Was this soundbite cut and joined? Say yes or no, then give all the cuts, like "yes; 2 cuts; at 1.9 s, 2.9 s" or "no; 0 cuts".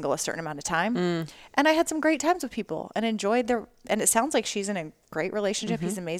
no; 0 cuts